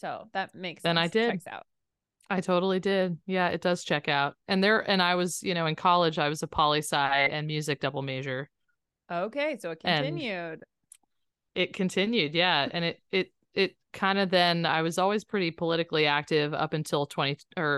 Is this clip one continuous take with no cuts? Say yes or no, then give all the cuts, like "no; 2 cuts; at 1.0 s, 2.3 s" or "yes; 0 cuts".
yes; 0 cuts